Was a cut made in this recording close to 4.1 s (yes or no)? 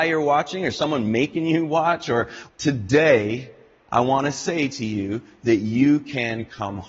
no